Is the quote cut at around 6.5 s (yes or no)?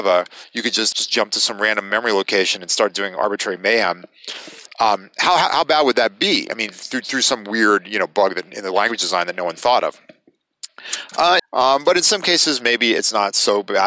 no